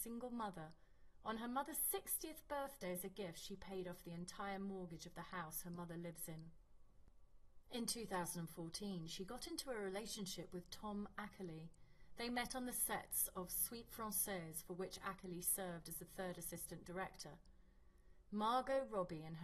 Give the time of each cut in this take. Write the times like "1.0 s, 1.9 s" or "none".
18.2 s